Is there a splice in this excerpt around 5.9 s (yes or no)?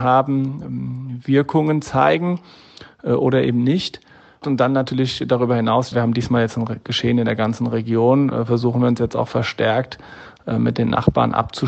yes